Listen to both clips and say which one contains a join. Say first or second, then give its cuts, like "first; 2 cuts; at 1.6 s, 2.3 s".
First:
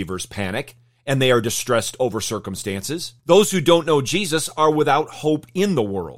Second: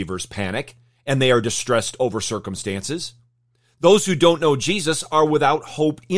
first; 1 cut; at 3.2 s